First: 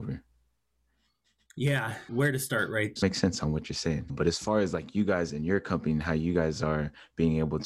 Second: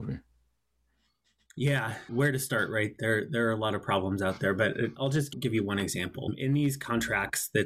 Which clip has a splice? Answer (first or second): first